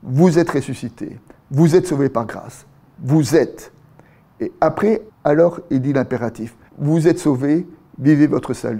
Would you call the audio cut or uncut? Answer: cut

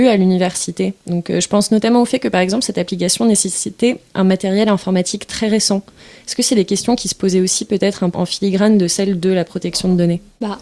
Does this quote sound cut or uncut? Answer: cut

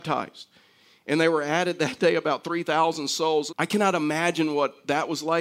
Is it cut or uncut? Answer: cut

